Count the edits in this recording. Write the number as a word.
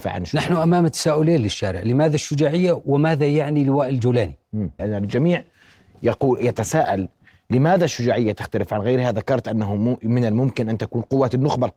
one